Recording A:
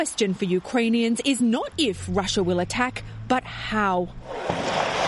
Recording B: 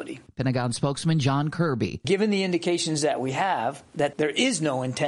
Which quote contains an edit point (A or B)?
A